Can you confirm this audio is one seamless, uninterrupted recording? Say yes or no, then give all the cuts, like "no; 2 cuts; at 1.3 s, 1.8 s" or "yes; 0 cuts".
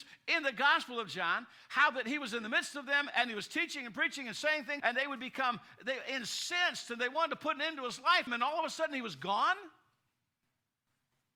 no; 2 cuts; at 4.8 s, 8.3 s